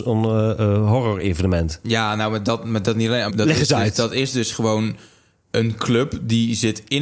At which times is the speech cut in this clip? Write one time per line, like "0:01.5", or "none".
0:03.3